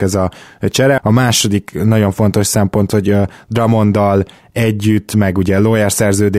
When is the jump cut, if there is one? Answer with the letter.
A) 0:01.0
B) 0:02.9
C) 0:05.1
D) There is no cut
A